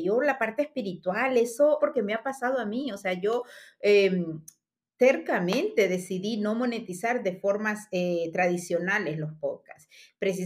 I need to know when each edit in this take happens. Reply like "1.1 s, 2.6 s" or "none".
1.8 s